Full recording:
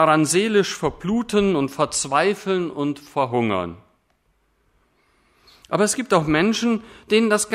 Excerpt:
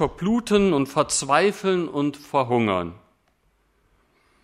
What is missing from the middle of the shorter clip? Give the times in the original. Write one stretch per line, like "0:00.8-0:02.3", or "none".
none